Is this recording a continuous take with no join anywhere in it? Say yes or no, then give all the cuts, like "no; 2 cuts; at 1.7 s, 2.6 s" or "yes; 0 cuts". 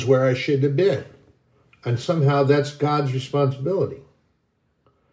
yes; 0 cuts